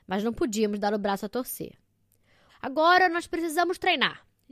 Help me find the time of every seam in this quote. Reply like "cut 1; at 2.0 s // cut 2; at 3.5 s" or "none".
cut 1; at 2.5 s